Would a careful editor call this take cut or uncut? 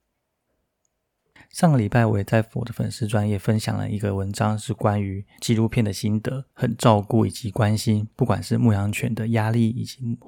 cut